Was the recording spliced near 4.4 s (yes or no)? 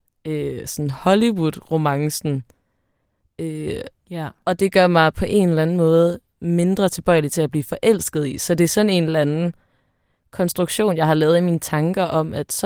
no